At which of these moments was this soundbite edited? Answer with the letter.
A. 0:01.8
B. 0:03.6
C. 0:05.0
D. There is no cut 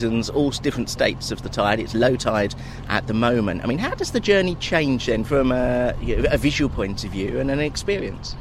D